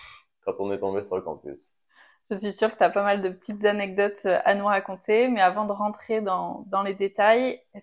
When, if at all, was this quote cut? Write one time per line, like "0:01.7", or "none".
none